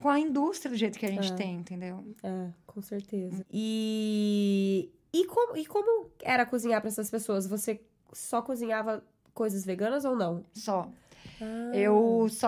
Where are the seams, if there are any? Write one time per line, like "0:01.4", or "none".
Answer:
0:03.4